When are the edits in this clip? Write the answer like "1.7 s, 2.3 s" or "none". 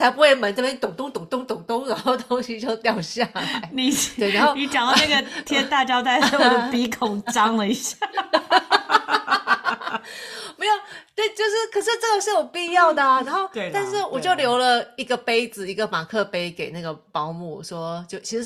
none